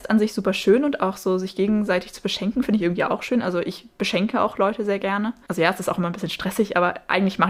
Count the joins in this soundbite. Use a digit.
0